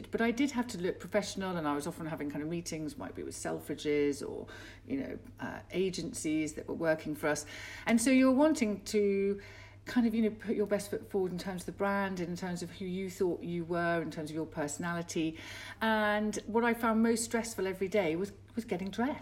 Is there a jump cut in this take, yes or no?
no